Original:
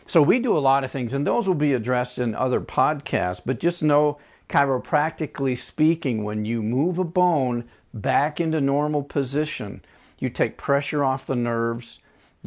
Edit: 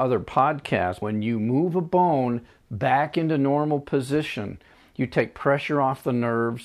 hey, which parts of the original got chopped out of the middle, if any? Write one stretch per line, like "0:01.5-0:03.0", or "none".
0:03.4-0:06.2